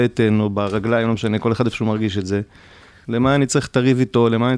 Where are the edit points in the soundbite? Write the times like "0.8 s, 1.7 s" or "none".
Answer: 3.0 s